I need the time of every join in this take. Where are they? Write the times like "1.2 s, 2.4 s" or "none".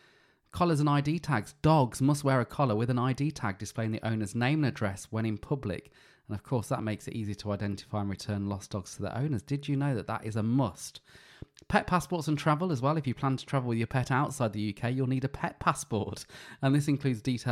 none